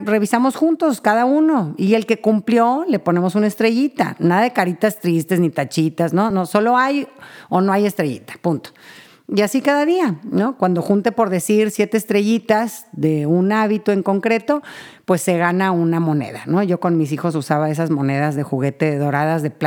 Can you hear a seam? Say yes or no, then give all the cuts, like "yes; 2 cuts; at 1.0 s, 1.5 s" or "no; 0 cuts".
no; 0 cuts